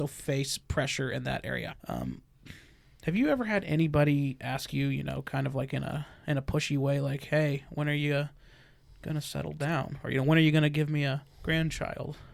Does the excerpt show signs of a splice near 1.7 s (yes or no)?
yes